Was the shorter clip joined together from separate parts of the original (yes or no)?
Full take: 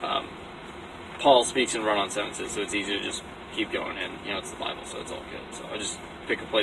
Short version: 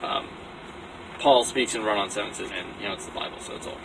yes